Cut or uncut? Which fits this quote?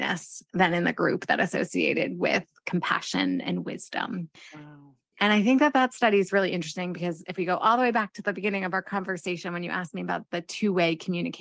uncut